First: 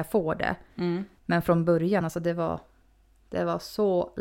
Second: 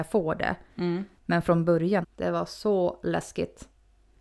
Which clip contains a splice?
second; 1 cut; at 2.0 s

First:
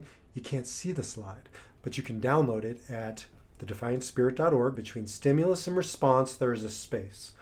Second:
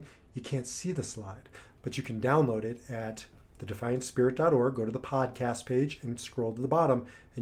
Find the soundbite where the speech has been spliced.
first; 1 cut; at 4.8 s

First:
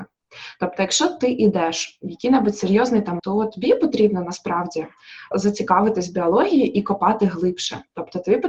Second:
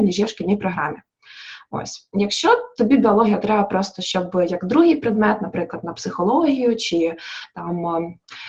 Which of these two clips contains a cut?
first; 2 cuts; at 3.2 s, 5.3 s

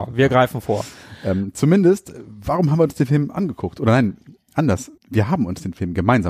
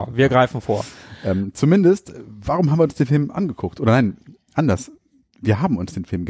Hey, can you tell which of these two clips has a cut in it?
first; 1 cut; at 5.0 s

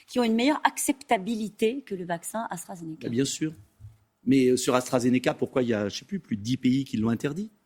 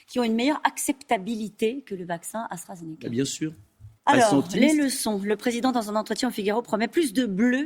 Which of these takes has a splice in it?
second; 1 cut; at 4.0 s

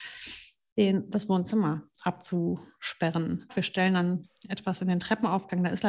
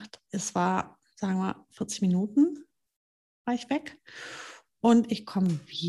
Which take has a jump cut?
first; 1 cut; at 3.5 s

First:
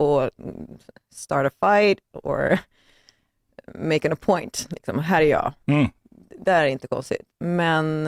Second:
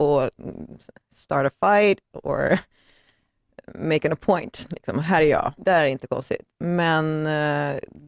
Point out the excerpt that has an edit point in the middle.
second; 1 cut; at 5.6 s

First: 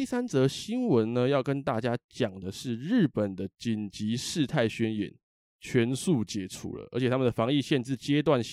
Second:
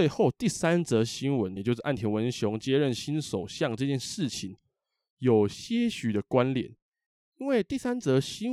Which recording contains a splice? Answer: second; 1 cut; at 1.6 s

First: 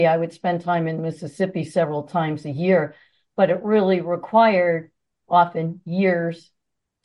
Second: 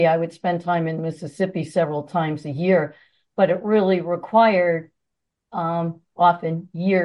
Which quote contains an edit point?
first; 1 cut; at 5.2 s

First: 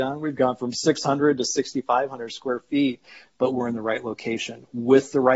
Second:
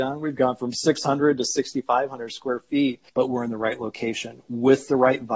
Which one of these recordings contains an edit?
second; 1 cut; at 3.1 s

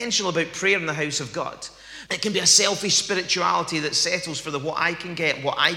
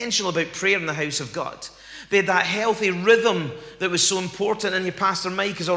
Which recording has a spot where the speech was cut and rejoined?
first; 1 cut; at 2.1 s

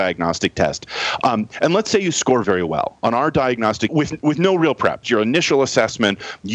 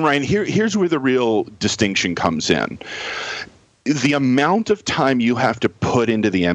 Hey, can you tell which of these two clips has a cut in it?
first; 3 cuts; at 2.4 s, 3.9 s, 5.0 s

